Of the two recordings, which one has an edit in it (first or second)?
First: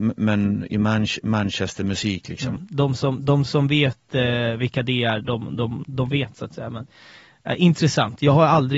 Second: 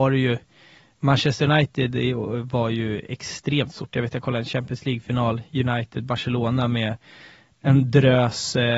first